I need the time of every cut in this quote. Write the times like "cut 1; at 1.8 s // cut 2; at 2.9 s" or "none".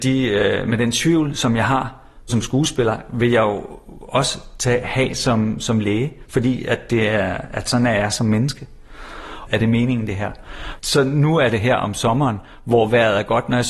cut 1; at 9.5 s // cut 2; at 10.8 s